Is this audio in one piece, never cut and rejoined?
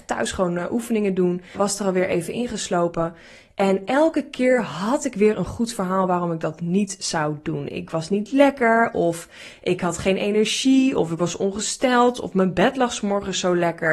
no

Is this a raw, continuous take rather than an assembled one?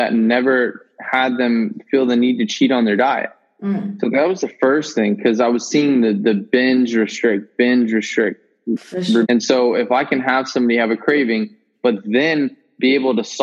no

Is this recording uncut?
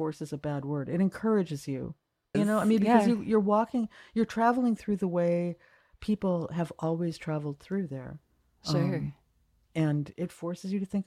no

